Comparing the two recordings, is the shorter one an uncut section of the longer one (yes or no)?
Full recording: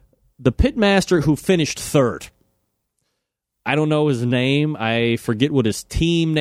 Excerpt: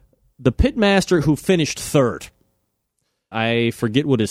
no